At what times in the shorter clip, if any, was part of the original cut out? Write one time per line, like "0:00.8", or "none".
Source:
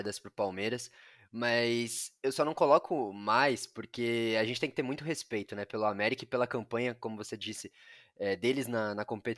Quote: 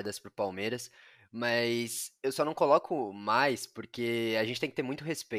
none